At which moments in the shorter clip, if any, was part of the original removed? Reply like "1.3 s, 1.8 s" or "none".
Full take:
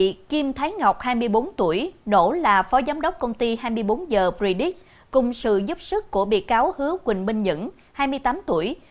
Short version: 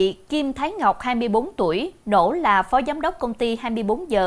none